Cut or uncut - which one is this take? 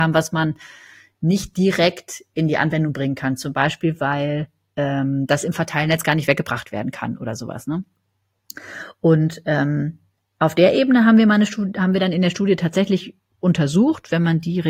uncut